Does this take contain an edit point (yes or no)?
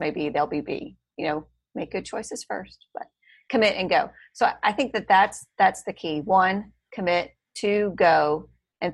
no